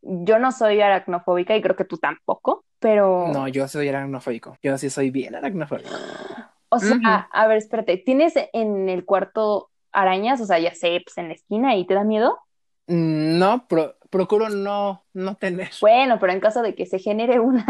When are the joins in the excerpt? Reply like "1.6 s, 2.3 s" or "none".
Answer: 4.6 s